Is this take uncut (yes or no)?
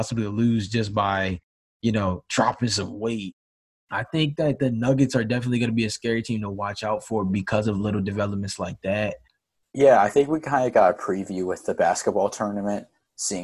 no